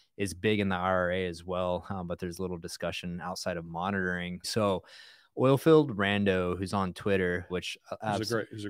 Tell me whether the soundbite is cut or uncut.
cut